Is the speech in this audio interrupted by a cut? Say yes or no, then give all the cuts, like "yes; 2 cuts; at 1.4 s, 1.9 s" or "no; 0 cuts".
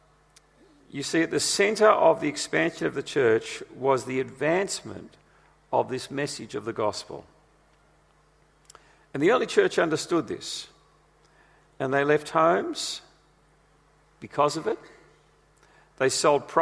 no; 0 cuts